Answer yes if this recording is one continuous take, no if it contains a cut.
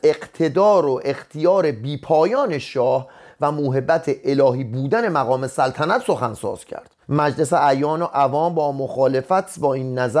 no